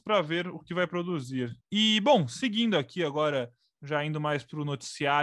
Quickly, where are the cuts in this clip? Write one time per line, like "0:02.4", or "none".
0:01.6